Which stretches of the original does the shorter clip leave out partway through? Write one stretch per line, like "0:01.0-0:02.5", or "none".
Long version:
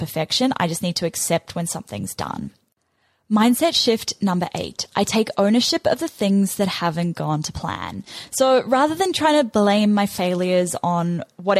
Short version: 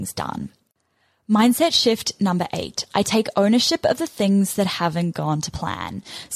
none